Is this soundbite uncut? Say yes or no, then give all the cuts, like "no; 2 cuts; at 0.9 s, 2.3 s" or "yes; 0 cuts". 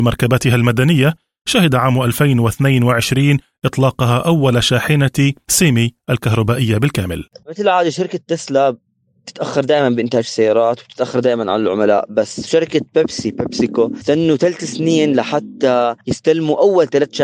yes; 0 cuts